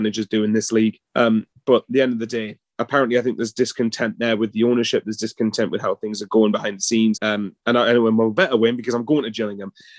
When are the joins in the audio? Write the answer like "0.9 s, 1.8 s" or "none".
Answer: 1.0 s, 7.1 s